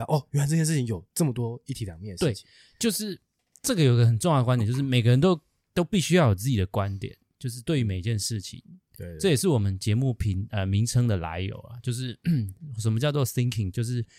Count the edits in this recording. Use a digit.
0